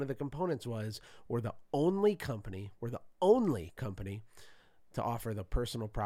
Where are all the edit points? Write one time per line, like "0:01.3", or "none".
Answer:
none